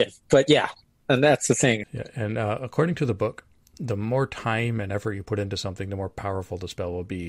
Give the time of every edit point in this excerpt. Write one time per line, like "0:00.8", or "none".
0:01.8
0:03.7